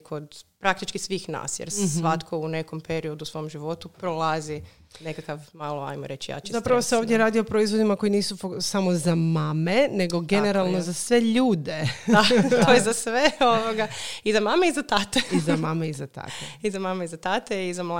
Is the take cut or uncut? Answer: uncut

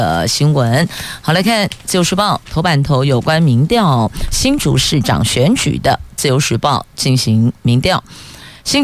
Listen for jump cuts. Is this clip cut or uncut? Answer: uncut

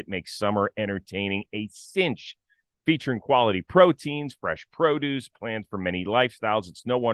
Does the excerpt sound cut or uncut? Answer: uncut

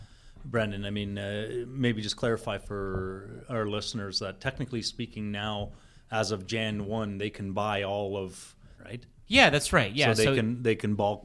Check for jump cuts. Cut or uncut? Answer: cut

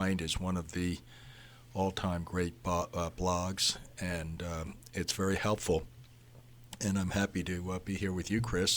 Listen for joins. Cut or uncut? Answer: uncut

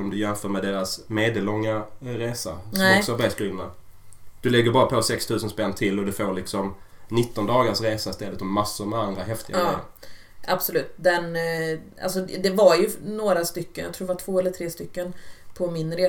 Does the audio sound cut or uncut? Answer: cut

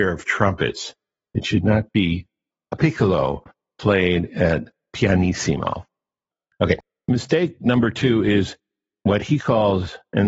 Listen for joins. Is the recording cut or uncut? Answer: cut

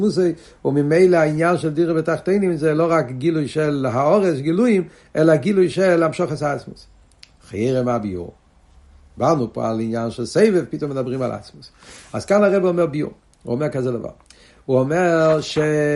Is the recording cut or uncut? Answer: uncut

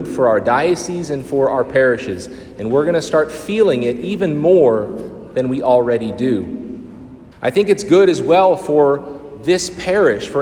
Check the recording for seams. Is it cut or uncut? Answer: cut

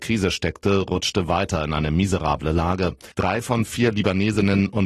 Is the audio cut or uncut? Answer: cut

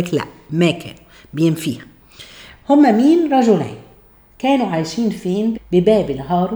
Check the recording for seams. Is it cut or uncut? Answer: cut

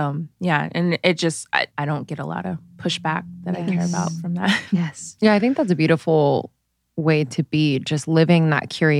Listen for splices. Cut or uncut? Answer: cut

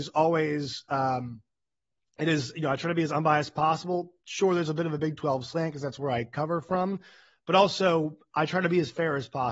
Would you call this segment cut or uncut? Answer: uncut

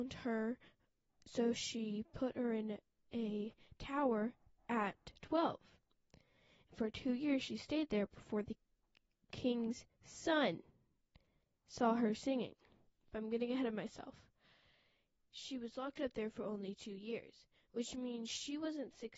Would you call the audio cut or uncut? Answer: uncut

